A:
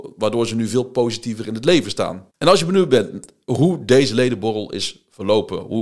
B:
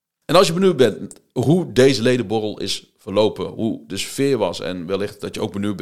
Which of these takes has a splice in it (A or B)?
A